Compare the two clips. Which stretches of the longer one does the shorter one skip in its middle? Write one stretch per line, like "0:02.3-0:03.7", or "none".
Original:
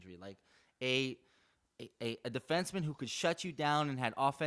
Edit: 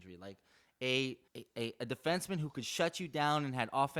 0:01.3-0:01.7